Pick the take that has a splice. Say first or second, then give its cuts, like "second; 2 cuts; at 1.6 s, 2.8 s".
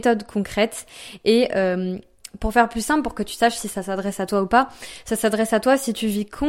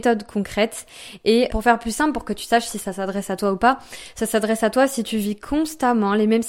second; 1 cut; at 1.5 s